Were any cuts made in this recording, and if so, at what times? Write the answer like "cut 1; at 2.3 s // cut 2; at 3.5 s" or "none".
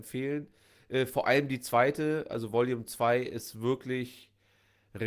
none